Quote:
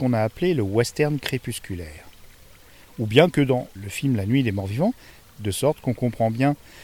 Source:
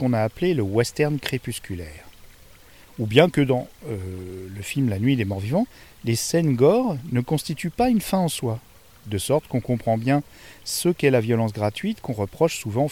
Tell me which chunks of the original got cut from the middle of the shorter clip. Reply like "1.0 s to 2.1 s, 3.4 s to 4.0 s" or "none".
3.8 s to 4.5 s, 5.9 s to 8.9 s